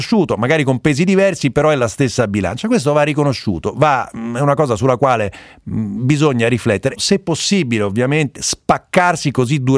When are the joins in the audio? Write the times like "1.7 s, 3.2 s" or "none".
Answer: 6.9 s, 8.4 s

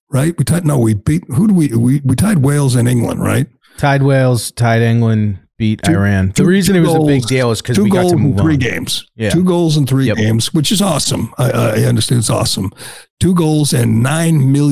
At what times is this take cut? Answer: none

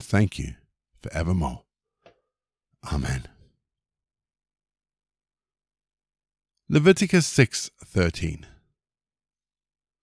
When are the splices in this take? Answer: none

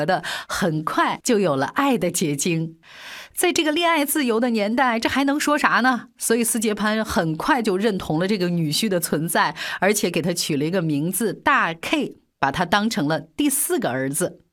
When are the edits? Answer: 3.3 s

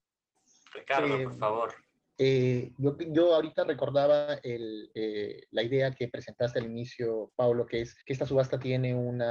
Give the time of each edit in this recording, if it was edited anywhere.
2.2 s, 8.0 s

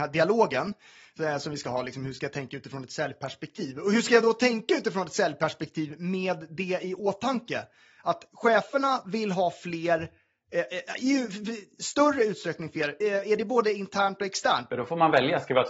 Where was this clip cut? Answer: 13.0 s, 14.7 s

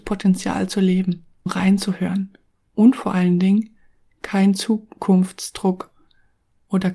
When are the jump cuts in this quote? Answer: 1.5 s

